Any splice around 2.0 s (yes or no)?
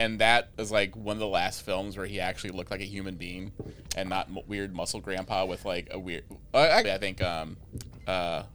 no